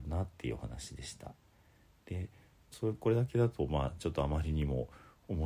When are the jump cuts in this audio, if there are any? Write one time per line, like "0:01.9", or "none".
none